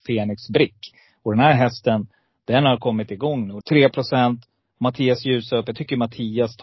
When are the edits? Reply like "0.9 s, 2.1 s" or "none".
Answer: 3.6 s